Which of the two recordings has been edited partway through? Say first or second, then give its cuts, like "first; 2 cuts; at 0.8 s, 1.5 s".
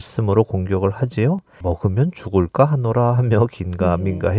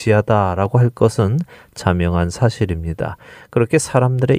first; 1 cut; at 1.6 s